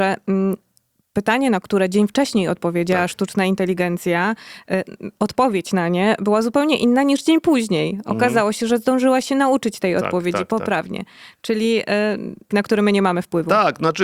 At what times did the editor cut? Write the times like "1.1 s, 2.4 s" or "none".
12.5 s